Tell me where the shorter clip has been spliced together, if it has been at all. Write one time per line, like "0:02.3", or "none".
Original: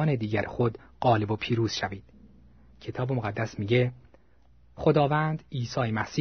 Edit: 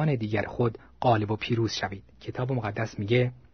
0:02.1